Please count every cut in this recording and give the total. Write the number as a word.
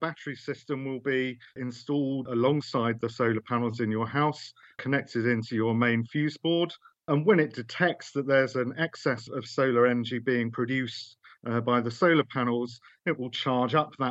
one